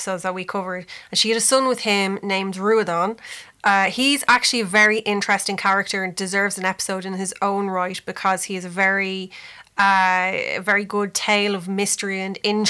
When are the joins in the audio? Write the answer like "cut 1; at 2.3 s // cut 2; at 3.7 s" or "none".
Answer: none